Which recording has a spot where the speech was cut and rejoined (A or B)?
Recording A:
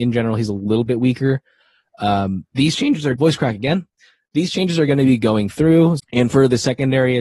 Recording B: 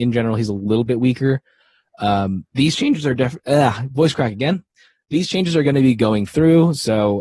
A